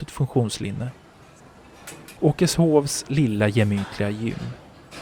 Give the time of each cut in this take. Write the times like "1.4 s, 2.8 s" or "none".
2.2 s